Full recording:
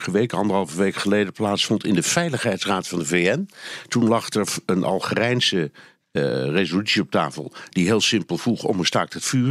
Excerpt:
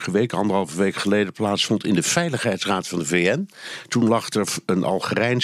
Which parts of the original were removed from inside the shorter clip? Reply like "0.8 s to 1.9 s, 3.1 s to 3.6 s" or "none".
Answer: none